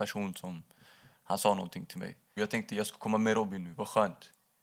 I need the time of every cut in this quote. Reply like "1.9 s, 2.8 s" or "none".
2.4 s